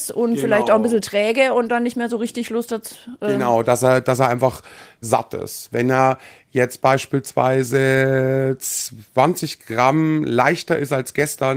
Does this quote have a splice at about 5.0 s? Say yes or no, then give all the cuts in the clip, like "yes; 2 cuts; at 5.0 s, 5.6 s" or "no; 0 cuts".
no; 0 cuts